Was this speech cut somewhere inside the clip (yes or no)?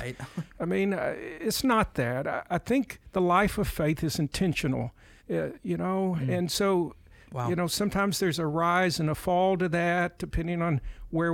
yes